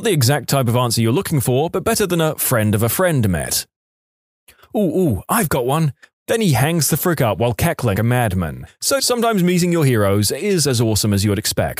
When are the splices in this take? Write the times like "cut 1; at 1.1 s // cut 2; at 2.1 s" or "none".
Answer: cut 1; at 6.1 s // cut 2; at 8.0 s // cut 3; at 9.0 s